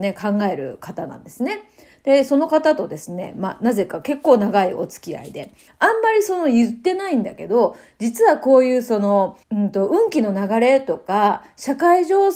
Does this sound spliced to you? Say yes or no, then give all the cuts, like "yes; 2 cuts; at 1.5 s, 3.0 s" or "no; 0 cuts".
yes; 2 cuts; at 5.7 s, 9.4 s